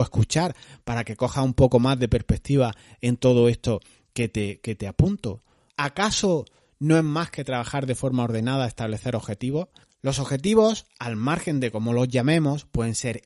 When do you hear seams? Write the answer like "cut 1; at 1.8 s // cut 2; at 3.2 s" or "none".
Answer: cut 1; at 5.7 s // cut 2; at 9.8 s

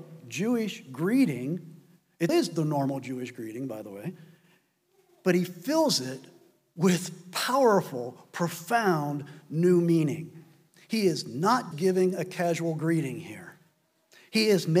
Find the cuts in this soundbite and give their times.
cut 1; at 2.3 s // cut 2; at 11.7 s

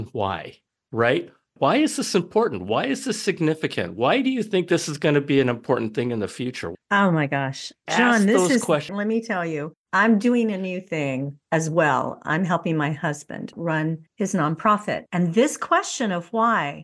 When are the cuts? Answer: cut 1; at 8.9 s

